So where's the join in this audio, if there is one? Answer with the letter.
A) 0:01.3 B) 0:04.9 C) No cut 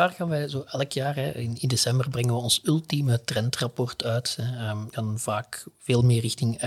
B